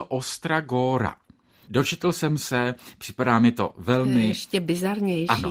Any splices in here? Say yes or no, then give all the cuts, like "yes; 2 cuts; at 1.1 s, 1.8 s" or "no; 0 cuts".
no; 0 cuts